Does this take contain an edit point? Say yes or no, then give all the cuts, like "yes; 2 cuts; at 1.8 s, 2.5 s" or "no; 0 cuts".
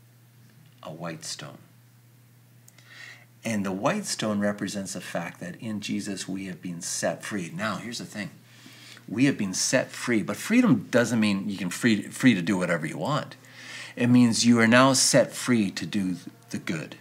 no; 0 cuts